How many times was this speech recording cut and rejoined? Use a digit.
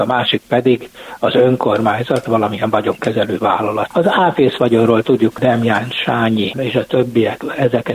2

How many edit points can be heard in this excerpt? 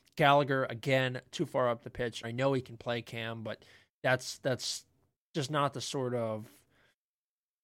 1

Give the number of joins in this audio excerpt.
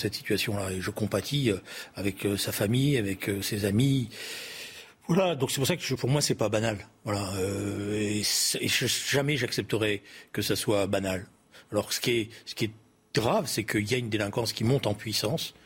0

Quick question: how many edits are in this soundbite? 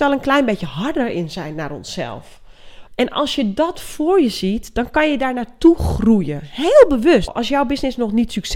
2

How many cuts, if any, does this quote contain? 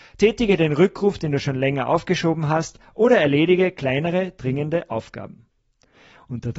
0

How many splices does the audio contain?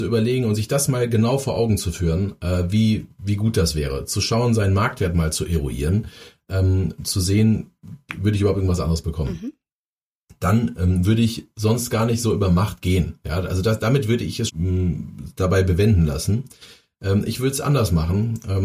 1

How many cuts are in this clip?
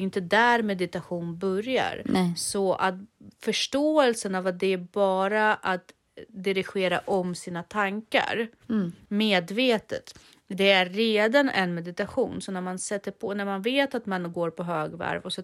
0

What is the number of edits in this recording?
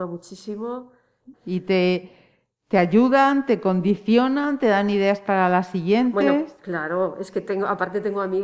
1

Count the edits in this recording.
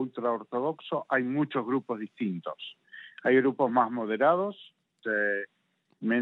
1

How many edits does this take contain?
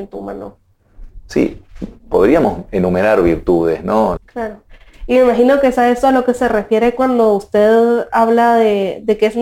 1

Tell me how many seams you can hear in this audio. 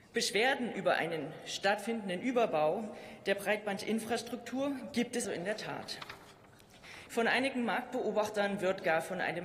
2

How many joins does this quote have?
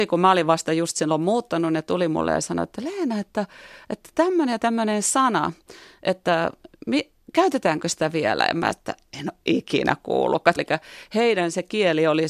1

